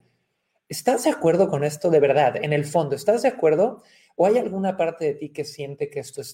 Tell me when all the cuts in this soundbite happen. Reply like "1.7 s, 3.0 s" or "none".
none